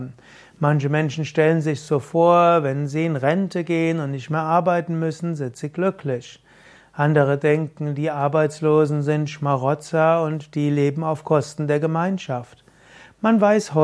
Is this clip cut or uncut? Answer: uncut